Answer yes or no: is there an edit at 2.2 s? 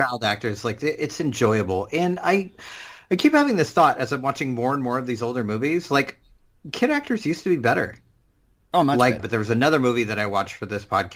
no